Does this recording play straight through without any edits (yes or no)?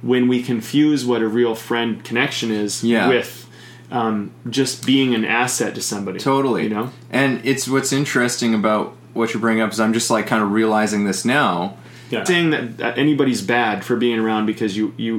no